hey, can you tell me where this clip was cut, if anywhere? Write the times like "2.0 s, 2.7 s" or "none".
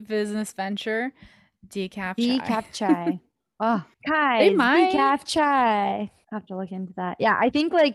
3.9 s, 6.2 s